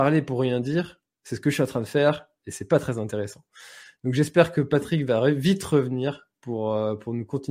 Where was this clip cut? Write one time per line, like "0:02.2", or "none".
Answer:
none